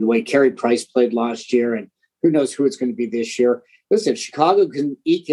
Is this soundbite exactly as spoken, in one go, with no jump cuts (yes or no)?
yes